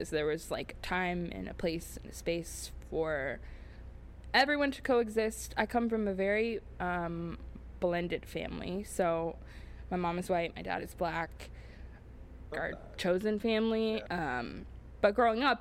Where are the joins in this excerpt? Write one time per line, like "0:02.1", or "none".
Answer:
0:12.5
0:14.1